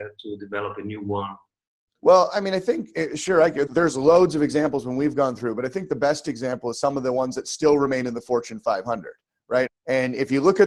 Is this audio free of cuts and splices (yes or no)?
no